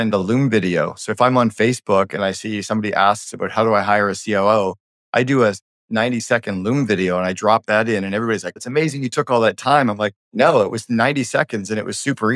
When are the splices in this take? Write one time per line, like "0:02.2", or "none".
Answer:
0:08.6
0:10.2